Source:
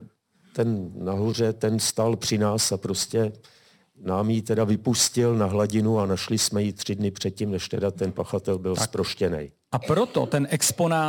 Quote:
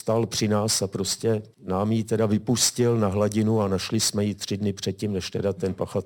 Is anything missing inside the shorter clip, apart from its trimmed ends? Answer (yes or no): yes